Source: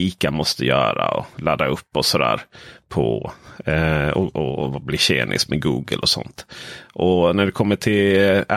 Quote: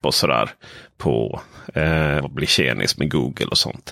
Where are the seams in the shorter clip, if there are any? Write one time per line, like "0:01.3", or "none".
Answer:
0:02.2